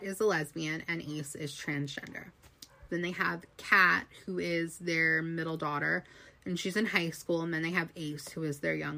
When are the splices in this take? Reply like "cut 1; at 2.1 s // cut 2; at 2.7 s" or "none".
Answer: cut 1; at 2.9 s